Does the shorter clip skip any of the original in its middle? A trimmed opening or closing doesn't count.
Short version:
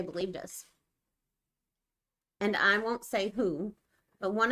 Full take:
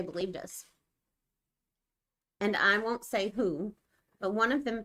no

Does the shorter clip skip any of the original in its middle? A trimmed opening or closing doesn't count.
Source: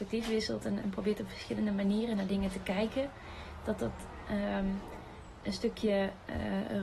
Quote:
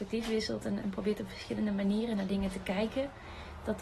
no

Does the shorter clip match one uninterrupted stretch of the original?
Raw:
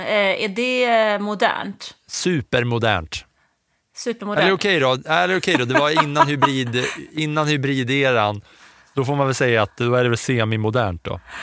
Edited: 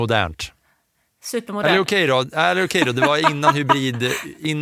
yes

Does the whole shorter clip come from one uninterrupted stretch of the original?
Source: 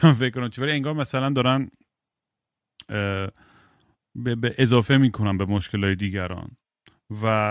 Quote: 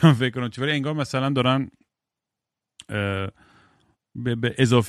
yes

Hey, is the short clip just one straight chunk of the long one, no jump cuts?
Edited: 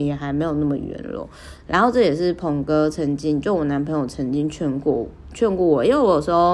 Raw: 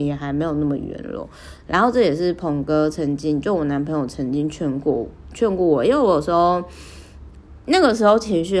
yes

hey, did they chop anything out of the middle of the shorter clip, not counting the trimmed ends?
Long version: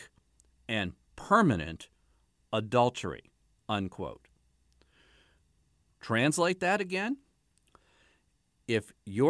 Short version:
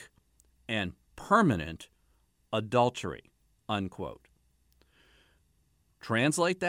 no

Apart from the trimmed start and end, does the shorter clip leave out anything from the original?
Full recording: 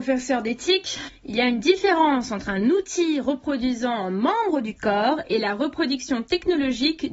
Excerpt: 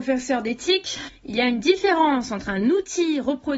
no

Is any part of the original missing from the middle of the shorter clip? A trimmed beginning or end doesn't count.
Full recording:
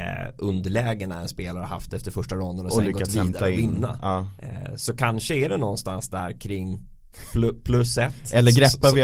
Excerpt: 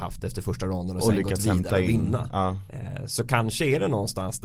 no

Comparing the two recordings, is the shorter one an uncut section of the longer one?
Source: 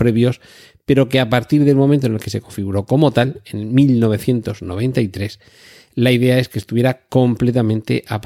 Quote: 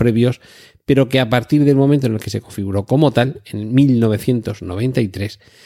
yes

